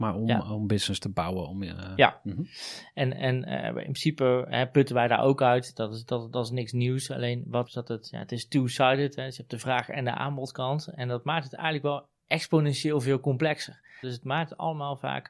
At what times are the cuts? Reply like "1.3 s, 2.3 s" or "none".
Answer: 7.7 s, 14.0 s